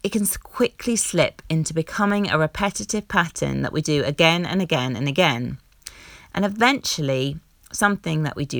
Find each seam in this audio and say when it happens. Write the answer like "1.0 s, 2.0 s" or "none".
none